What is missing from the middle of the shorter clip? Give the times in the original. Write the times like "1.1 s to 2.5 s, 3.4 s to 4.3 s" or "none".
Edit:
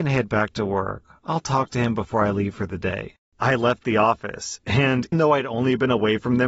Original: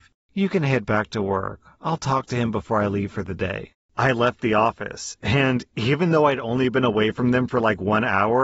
5.7 s to 6.1 s